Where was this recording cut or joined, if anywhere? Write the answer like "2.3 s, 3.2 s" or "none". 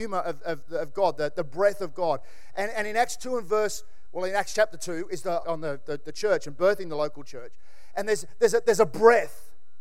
5.4 s